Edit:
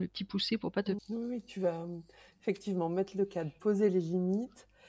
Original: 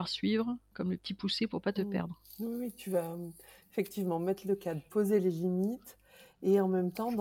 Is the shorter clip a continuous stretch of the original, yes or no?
no